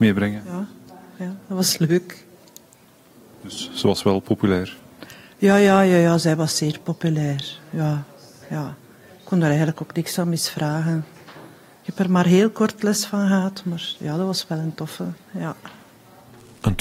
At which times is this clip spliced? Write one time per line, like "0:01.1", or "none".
0:15.2